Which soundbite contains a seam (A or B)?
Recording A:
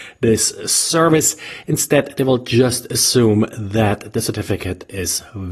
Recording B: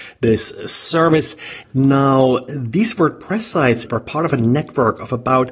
B